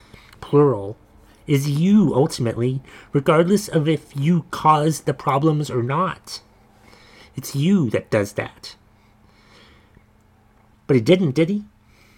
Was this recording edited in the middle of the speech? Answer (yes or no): yes